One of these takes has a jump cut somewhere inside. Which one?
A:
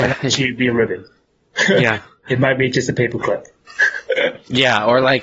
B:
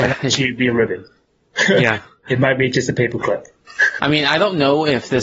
B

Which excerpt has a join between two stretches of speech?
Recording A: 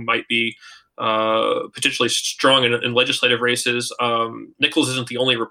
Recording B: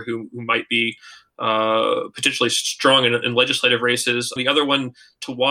B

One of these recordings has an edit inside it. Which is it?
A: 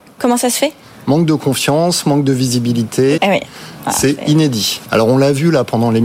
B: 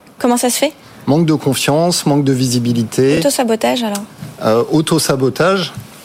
A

